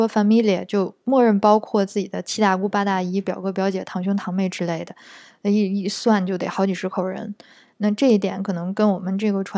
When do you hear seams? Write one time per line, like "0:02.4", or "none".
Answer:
none

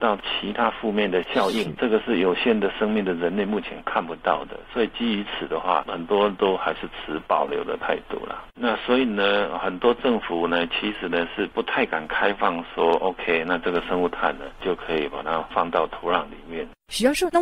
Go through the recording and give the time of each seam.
none

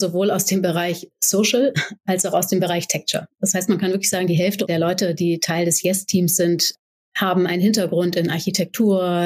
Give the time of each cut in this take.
none

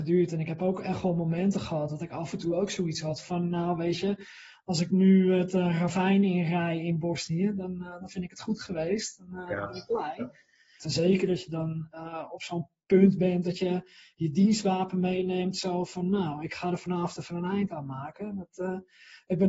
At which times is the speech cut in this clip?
0:10.8

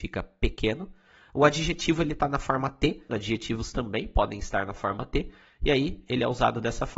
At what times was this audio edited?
0:03.1

